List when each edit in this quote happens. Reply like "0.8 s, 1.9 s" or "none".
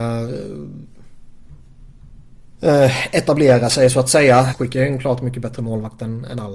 2.5 s, 4.5 s